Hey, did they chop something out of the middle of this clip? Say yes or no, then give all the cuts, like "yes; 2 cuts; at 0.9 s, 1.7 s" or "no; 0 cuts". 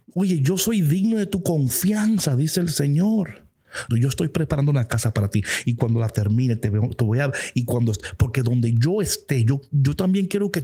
yes; 1 cut; at 3.9 s